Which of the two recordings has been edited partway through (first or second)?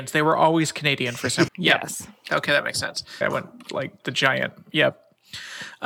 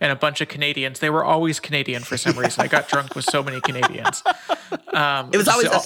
first